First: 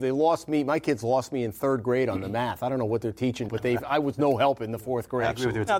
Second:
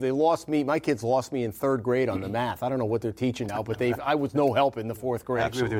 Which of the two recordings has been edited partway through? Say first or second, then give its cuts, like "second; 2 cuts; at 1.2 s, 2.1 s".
first; 1 cut; at 3.5 s